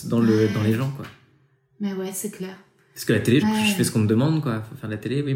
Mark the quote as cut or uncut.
cut